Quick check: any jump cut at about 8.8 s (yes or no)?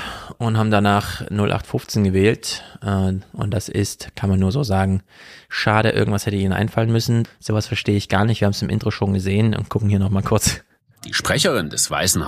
no